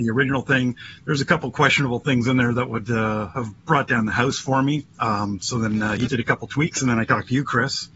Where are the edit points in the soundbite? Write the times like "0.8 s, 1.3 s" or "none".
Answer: 3.6 s, 6.1 s